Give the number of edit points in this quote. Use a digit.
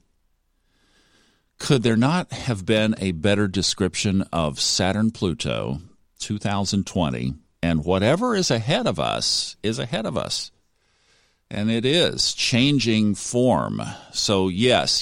0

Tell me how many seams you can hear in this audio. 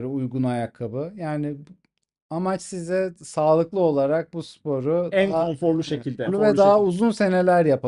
1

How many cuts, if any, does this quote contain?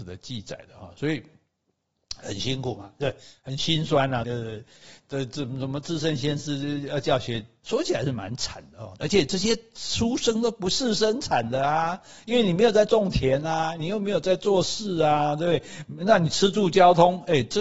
3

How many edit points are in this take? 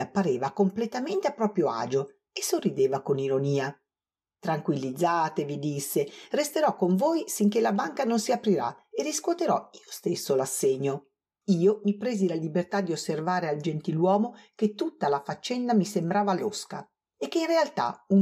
1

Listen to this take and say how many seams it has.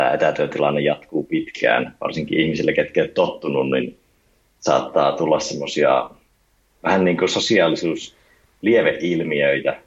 0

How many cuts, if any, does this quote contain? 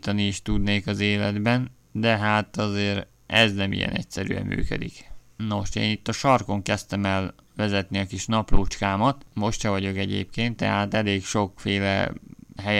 3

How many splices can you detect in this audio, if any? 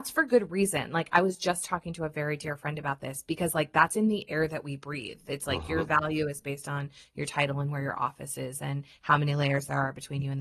0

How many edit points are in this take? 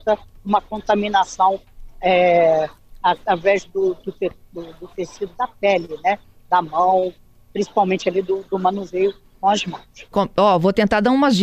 1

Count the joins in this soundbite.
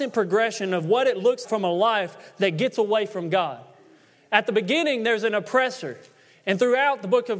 1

